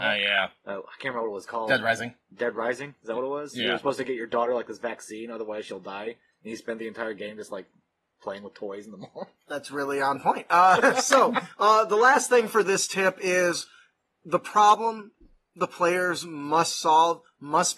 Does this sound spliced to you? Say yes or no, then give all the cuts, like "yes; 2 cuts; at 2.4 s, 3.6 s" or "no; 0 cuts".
no; 0 cuts